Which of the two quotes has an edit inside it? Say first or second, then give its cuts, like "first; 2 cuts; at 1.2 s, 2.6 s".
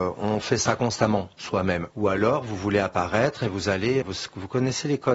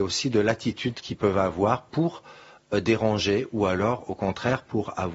first; 2 cuts; at 1.9 s, 4.0 s